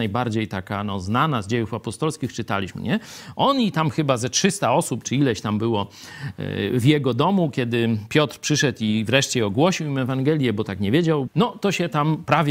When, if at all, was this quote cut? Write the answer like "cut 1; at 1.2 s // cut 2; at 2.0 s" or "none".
cut 1; at 11.3 s